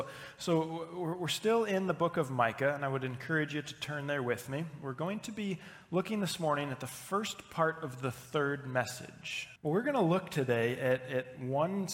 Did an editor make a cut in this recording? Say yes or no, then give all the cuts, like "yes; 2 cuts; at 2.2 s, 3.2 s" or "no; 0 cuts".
yes; 1 cut; at 9.6 s